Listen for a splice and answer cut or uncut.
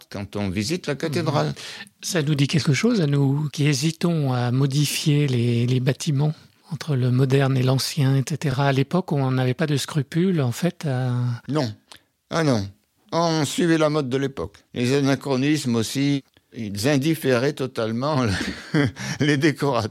uncut